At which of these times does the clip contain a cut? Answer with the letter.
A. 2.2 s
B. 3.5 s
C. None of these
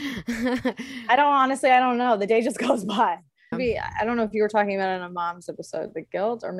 B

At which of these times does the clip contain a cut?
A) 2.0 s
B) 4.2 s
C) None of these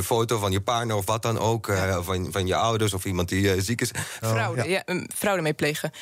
B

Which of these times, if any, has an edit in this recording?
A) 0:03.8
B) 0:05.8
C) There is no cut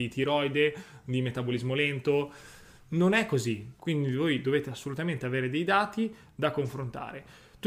A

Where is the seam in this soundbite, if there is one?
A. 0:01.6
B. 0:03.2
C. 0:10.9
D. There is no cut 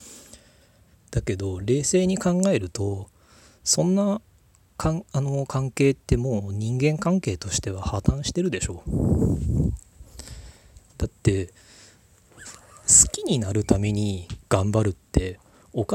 D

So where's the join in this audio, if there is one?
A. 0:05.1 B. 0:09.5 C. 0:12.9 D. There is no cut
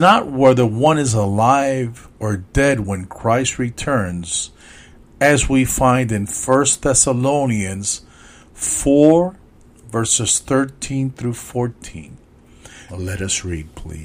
C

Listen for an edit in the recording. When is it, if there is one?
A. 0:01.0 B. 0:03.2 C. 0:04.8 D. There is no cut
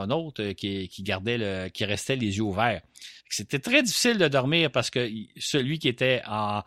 B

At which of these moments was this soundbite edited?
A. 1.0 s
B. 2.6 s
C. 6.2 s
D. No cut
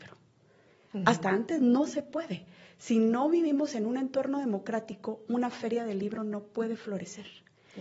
D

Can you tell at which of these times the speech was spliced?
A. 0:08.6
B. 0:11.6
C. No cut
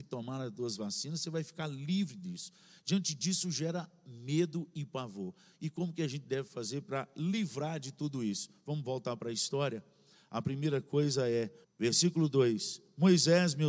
B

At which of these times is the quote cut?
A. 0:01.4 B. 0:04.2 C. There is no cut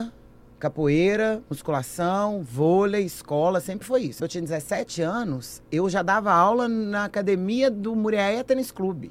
B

